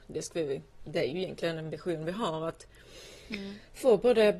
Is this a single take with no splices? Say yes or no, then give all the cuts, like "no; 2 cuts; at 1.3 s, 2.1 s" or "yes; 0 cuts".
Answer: yes; 0 cuts